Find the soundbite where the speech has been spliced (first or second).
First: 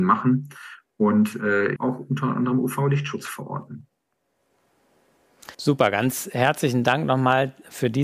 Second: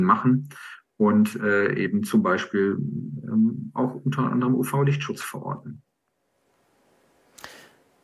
first